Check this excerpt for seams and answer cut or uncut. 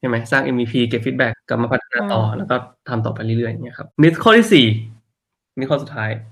cut